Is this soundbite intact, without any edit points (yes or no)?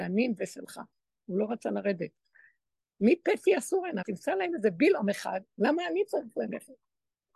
no